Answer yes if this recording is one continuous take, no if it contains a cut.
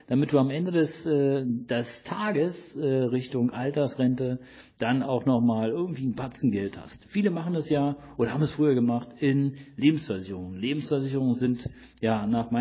yes